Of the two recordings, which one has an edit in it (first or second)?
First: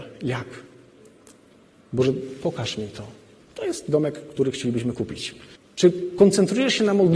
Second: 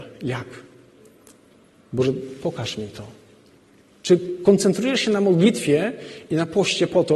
first